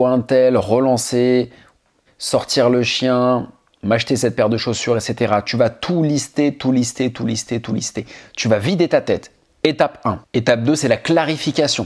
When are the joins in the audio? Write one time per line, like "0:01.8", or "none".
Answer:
0:02.1